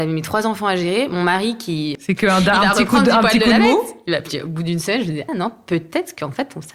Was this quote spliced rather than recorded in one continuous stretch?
yes; 2 cuts; at 2.0 s, 5.3 s

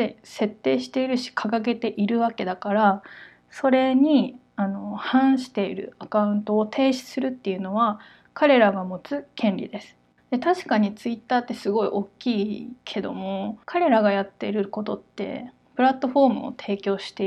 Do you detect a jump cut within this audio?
yes; 2 cuts; at 10.2 s, 13.6 s

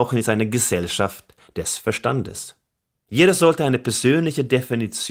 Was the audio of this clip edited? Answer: yes; 1 cut; at 3.1 s

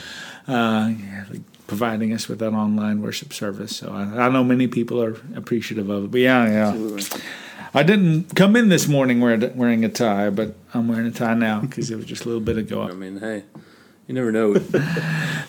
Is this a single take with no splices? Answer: no; 2 cuts; at 12.8 s, 14.5 s

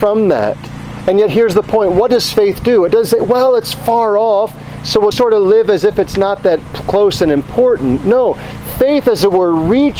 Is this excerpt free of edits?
no; 1 cut; at 5.1 s

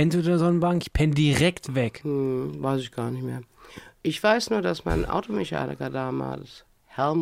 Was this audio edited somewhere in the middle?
no; 0 cuts

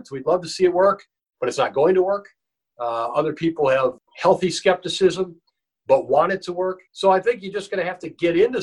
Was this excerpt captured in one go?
no; 1 cut; at 6.9 s

